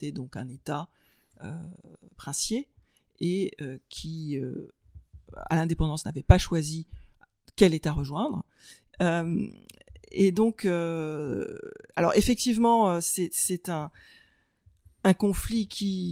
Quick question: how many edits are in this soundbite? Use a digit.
1